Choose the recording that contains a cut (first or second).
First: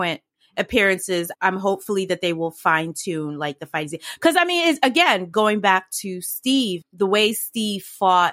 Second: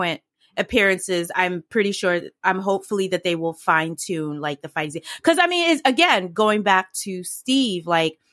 first